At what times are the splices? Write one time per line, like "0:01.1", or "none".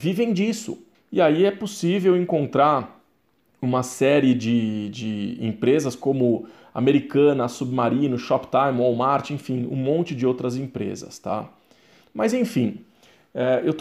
0:00.9
0:12.0

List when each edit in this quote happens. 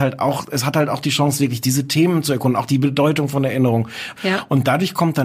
0:04.2

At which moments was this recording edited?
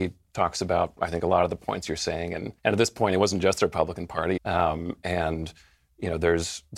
0:02.6
0:04.4

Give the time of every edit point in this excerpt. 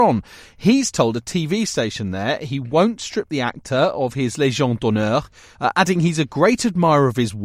0:05.5

